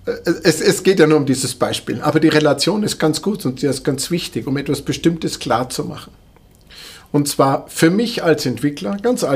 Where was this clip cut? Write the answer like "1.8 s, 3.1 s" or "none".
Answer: none